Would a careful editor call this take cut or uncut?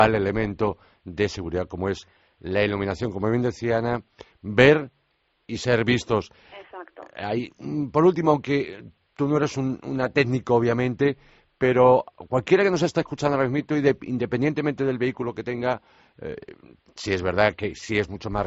uncut